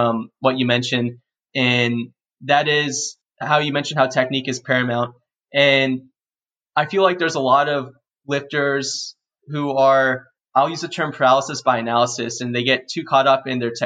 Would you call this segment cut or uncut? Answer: uncut